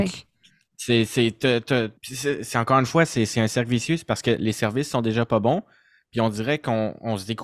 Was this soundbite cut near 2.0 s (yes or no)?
yes